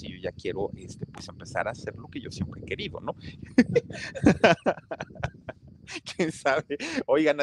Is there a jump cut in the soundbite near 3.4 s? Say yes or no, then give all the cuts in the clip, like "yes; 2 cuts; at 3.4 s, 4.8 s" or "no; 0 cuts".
yes; 1 cut; at 3.4 s